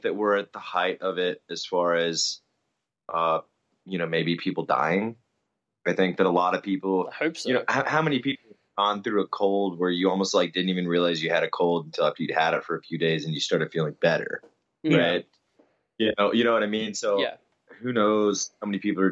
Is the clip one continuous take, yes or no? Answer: yes